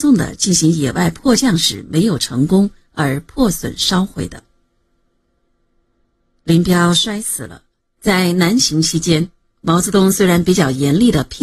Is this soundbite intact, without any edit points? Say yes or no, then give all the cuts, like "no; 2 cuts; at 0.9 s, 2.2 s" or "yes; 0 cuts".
no; 1 cut; at 8.0 s